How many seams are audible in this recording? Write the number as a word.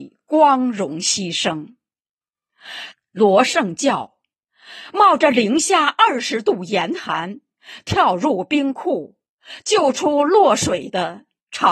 one